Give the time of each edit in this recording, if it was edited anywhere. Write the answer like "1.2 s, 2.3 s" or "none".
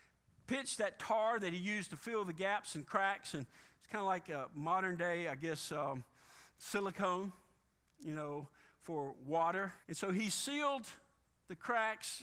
9.8 s